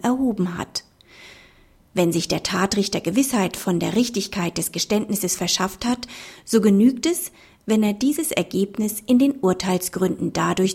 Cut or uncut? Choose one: uncut